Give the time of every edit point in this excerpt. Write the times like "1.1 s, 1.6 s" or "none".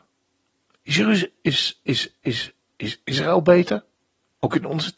none